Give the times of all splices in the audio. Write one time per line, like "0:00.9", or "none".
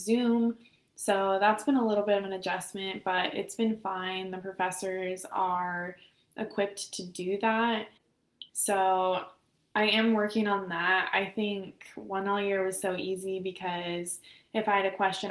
0:08.5